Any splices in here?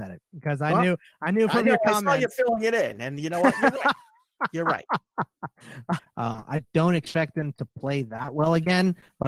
yes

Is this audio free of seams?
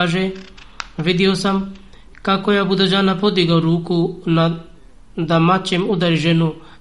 yes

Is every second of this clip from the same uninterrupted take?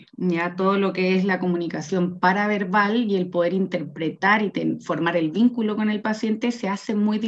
yes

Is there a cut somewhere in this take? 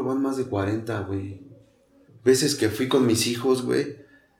yes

